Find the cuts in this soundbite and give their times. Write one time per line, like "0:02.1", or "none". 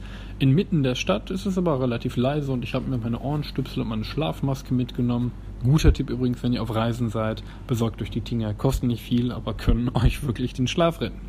none